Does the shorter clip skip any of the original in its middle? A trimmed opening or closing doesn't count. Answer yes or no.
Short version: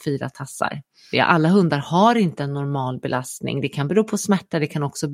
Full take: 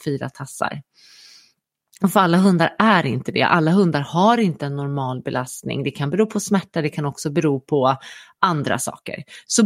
yes